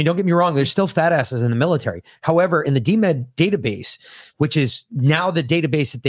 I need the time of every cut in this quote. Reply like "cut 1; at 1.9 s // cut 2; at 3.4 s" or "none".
none